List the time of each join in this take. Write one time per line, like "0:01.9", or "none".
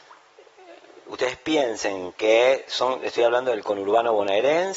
none